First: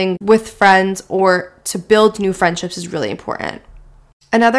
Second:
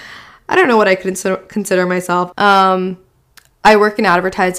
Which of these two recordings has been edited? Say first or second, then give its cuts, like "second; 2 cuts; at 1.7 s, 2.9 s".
second; 1 cut; at 2.3 s